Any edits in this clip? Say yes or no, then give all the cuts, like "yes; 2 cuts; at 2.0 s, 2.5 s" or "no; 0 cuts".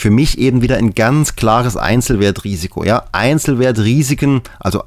no; 0 cuts